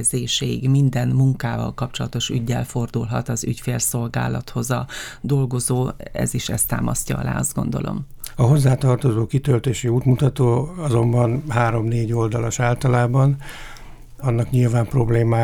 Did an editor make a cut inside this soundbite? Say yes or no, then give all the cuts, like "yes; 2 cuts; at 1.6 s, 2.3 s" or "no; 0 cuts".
yes; 2 cuts; at 8.3 s, 14.2 s